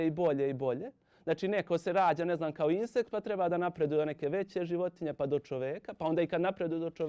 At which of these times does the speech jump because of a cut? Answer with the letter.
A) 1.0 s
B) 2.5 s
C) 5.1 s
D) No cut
D